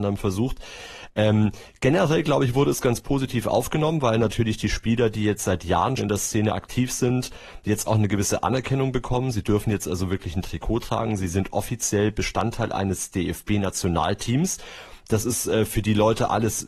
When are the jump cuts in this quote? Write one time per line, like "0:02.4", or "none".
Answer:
0:06.0